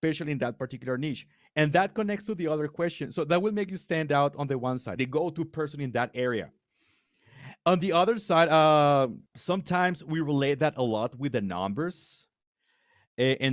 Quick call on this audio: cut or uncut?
cut